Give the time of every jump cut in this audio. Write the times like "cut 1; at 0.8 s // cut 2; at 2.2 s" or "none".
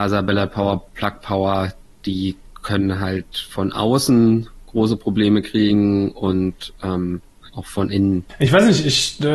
cut 1; at 7.5 s